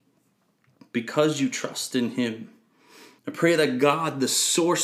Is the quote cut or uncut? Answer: cut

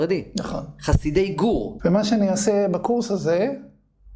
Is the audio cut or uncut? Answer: cut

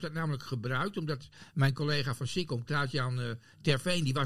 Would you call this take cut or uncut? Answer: uncut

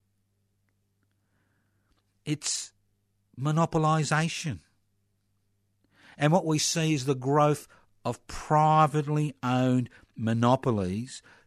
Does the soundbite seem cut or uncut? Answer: uncut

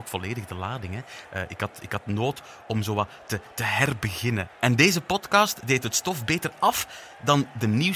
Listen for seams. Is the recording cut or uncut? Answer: uncut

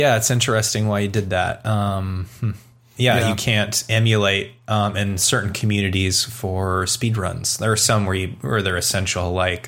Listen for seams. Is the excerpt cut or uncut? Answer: uncut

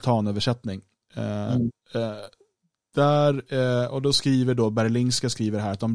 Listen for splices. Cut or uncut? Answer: uncut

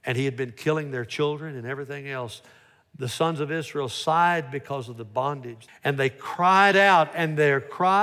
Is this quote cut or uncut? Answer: cut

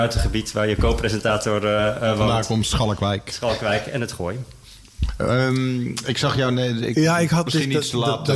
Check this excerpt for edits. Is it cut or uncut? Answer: cut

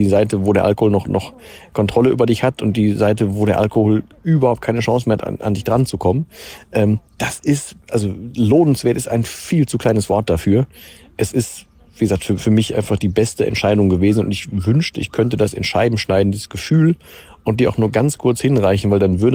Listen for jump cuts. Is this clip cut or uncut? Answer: uncut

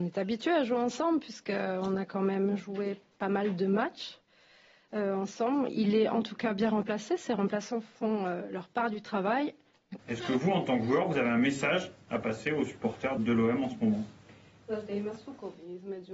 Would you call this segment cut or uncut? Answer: cut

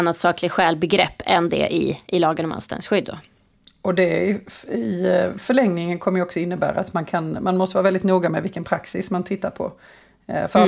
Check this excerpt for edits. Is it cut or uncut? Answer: uncut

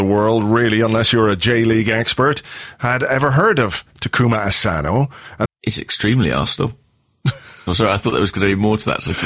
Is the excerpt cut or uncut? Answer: cut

